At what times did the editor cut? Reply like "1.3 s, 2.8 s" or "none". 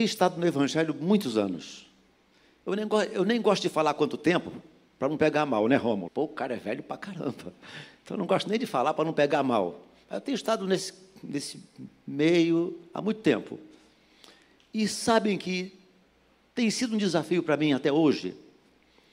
6.1 s